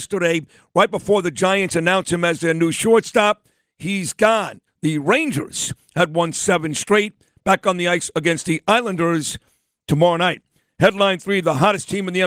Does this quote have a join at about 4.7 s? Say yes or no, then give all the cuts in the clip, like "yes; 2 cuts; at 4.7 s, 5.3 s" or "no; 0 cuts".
yes; 1 cut; at 4.7 s